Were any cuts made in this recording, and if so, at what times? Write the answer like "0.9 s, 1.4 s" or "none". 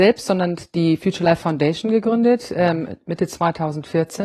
none